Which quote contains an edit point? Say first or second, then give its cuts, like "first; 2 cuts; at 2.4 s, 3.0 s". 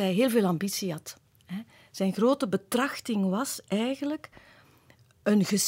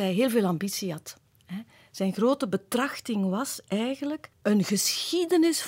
second; 1 cut; at 4.3 s